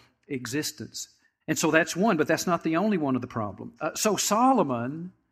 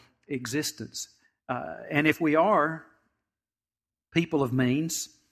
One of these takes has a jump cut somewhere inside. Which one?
first; 2 cuts; at 1.4 s, 3.8 s

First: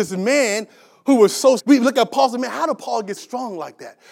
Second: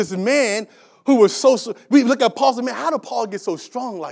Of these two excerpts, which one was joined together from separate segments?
first; 2 cuts; at 1.6 s, 3.2 s

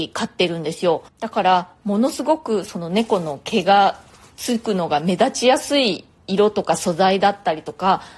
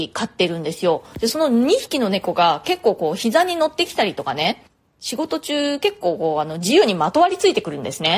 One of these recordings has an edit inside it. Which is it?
first; 1 cut; at 1.1 s

